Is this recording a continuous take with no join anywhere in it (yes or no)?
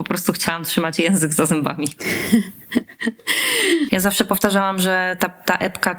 no